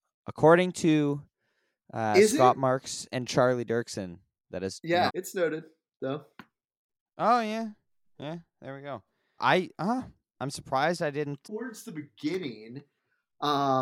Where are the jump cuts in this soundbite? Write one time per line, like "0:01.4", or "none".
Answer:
0:05.1
0:09.4
0:11.4